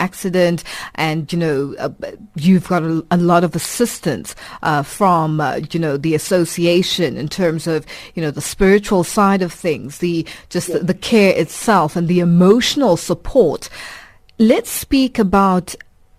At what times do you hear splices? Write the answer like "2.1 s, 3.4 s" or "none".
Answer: 1.3 s